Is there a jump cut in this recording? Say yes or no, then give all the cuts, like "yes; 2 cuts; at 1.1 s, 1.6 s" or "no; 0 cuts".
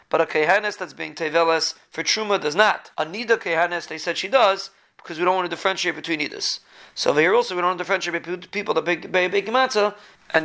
yes; 1 cut; at 2.9 s